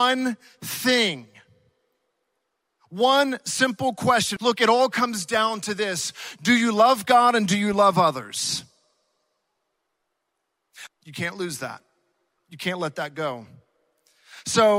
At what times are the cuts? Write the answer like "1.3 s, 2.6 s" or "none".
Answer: 4.4 s, 10.9 s